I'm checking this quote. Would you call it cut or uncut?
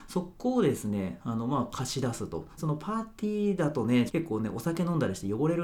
cut